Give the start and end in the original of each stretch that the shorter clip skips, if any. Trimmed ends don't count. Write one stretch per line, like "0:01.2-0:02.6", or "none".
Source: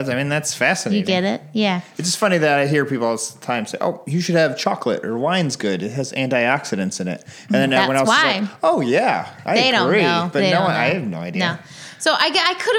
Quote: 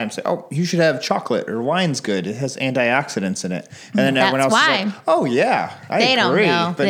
none